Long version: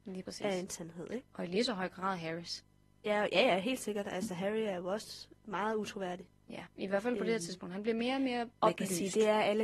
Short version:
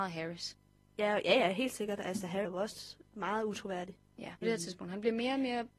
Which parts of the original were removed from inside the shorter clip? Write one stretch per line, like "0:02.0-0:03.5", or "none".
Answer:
0:04.5-0:04.8
0:06.7-0:07.2